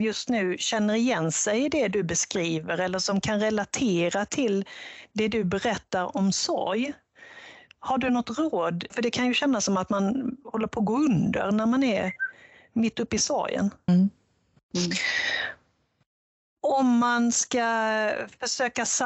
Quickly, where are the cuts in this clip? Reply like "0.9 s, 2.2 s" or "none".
8.9 s, 13.9 s